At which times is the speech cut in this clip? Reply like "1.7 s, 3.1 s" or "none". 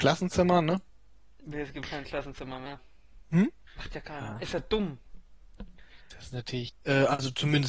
3.7 s, 6.7 s